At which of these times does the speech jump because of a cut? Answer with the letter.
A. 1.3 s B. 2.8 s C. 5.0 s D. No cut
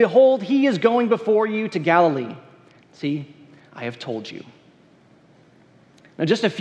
B